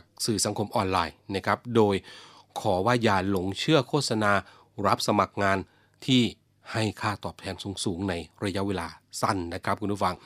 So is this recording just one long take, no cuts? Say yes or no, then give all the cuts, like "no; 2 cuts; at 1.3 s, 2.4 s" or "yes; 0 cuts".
yes; 0 cuts